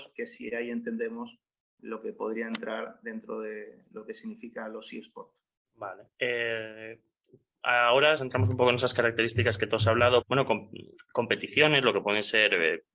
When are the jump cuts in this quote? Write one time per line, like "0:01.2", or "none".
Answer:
0:06.1
0:08.2
0:10.2